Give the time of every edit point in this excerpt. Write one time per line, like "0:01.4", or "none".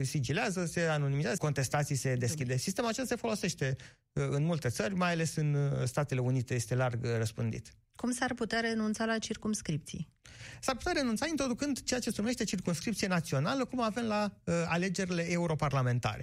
0:01.4